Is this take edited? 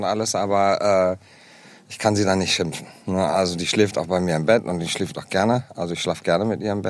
no; 0 cuts

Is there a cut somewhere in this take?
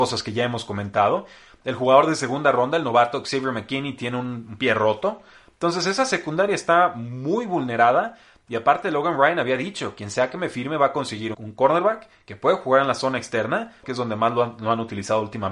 yes; 2 cuts; at 11.3 s, 13.8 s

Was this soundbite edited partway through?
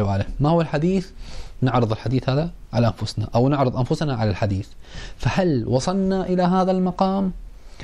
yes; 1 cut; at 1.5 s

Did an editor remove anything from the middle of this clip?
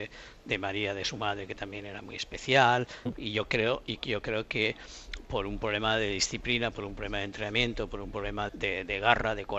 yes; 2 cuts; at 3.1 s, 8.5 s

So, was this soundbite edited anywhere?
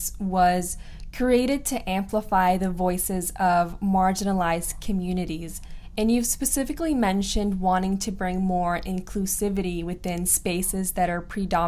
no; 0 cuts

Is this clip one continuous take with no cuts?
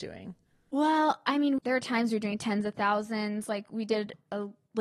no; 1 cut; at 1.6 s

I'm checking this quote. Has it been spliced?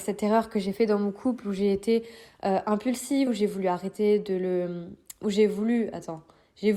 yes; 1 cut; at 3.3 s

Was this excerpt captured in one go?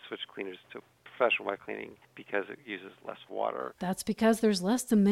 yes; 0 cuts

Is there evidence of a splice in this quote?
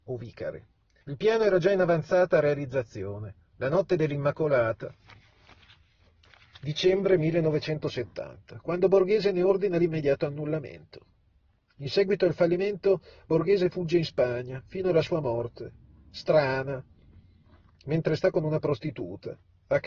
yes; 1 cut; at 1.0 s

